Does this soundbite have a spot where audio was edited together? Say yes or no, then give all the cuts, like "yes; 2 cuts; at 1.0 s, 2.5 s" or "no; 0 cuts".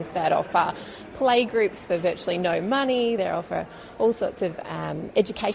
no; 0 cuts